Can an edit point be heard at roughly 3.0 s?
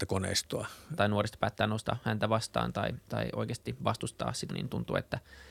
no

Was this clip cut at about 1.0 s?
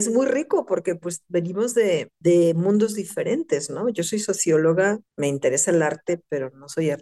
no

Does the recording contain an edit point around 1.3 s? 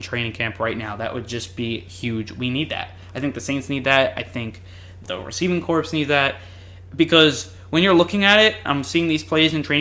no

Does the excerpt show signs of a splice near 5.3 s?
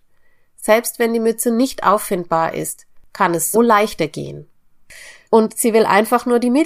yes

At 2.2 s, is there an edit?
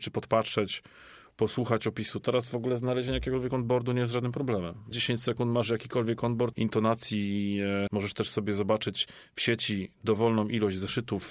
no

